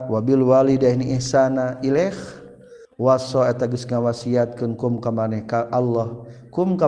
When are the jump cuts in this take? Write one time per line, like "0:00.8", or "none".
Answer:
0:02.8